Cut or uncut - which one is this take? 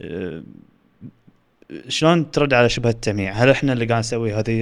uncut